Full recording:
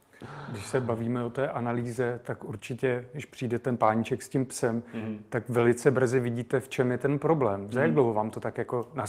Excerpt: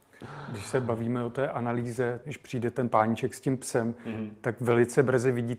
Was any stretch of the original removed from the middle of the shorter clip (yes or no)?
yes